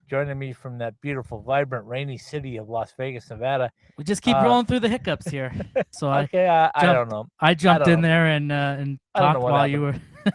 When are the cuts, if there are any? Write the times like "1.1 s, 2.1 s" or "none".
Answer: 5.9 s